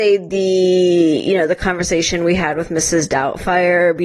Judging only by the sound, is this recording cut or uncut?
uncut